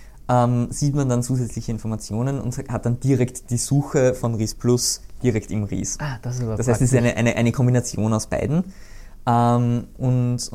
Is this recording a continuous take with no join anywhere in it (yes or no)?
yes